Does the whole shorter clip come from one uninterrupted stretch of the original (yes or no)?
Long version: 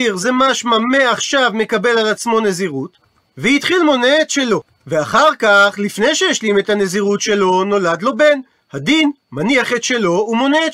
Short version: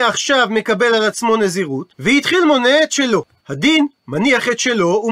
no